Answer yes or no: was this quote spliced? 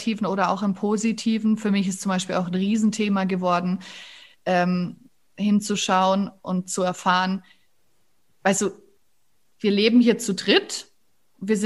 no